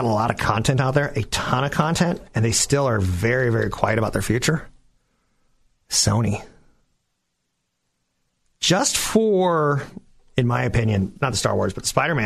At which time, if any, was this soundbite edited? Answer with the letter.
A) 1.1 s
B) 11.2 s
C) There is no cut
B